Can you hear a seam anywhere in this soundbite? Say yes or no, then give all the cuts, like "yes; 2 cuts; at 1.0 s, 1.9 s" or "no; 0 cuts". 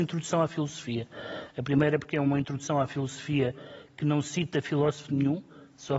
yes; 1 cut; at 1.5 s